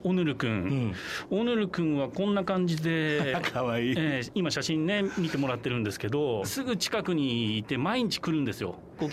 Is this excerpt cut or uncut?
cut